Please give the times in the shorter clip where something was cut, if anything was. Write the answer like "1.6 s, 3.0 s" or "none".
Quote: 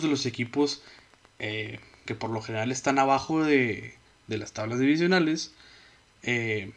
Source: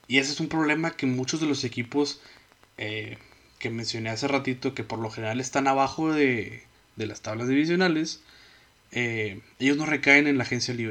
2.0 s